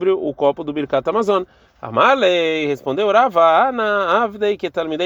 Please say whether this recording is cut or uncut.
cut